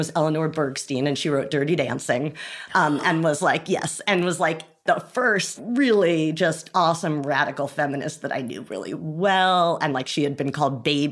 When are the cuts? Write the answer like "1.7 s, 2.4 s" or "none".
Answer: none